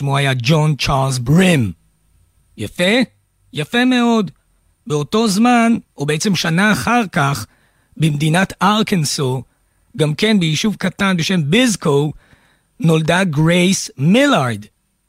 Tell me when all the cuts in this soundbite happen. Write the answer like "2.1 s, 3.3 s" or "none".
none